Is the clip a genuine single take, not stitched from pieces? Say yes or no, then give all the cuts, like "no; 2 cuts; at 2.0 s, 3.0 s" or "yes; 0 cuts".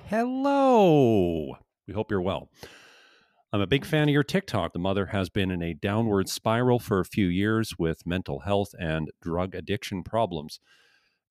no; 1 cut; at 4.7 s